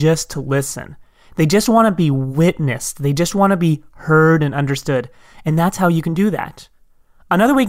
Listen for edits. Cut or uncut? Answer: uncut